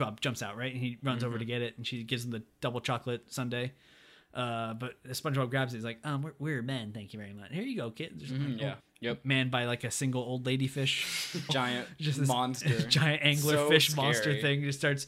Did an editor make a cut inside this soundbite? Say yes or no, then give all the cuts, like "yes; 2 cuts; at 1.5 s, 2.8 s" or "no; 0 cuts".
yes; 2 cuts; at 8.8 s, 11.5 s